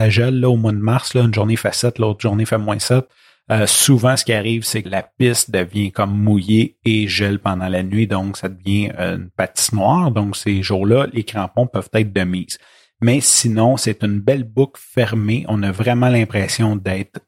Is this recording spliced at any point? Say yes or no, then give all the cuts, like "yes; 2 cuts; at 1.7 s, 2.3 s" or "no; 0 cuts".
yes; 1 cut; at 4.9 s